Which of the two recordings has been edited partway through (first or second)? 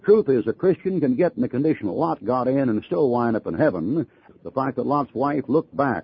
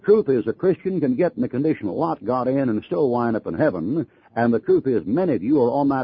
first